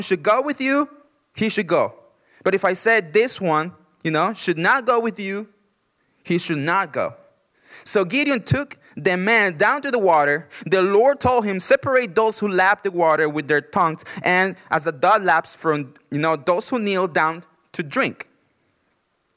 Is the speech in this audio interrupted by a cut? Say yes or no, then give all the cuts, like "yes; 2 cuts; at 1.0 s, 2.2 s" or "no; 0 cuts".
no; 0 cuts